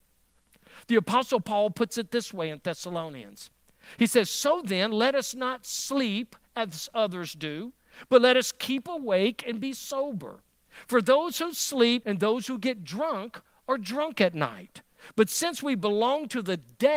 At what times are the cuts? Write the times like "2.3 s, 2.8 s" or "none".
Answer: 12.0 s